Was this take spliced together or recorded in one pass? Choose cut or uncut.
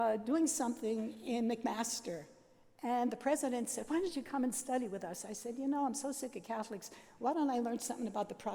uncut